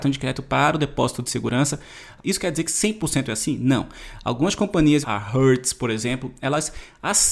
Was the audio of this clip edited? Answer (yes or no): yes